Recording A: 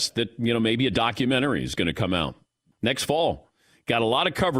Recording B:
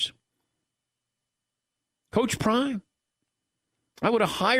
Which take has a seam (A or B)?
A